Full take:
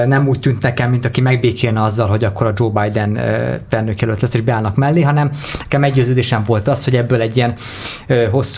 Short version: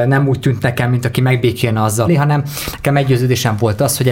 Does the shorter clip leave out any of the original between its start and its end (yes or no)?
yes